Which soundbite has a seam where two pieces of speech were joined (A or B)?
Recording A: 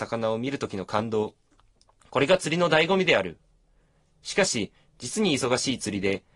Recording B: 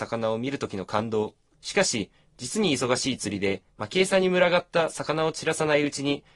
B